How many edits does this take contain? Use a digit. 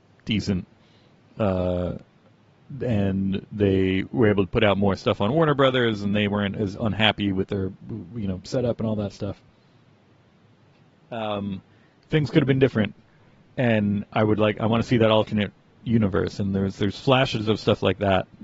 0